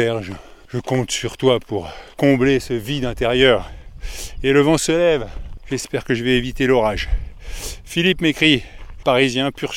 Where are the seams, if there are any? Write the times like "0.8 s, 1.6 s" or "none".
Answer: none